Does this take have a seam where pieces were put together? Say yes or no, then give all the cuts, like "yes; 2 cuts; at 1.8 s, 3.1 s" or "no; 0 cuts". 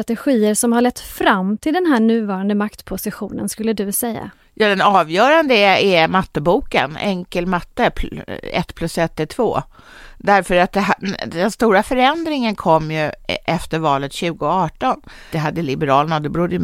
yes; 1 cut; at 15.3 s